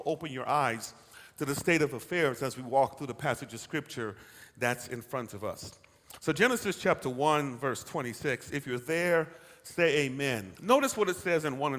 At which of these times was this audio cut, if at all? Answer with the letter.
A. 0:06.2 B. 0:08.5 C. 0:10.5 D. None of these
C